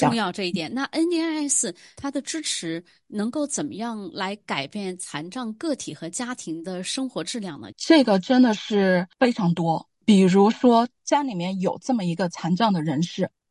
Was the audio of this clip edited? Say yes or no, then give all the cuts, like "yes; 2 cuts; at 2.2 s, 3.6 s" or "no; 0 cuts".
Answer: yes; 1 cut; at 7.7 s